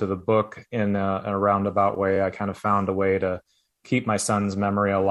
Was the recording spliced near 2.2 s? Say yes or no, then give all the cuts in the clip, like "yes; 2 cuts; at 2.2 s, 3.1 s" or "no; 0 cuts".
no; 0 cuts